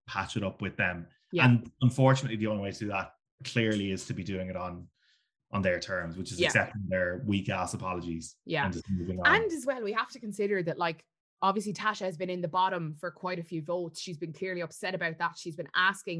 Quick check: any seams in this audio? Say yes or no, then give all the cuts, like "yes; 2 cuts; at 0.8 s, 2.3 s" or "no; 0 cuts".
no; 0 cuts